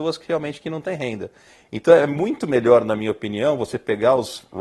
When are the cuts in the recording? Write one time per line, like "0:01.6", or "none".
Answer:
none